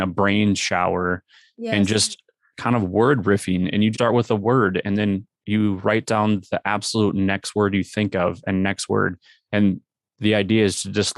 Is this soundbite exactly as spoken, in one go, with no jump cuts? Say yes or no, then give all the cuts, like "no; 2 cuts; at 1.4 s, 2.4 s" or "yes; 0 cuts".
no; 2 cuts; at 2.5 s, 3.9 s